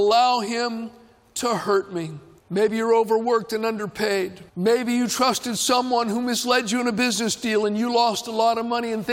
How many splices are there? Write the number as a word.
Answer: two